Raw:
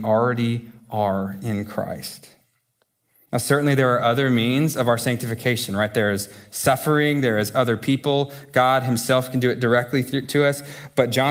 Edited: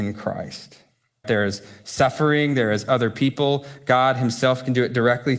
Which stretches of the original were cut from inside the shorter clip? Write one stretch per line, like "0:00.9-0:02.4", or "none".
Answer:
0:02.8-0:05.9